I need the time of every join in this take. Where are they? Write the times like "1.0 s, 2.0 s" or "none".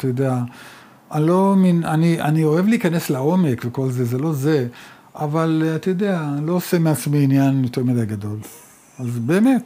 none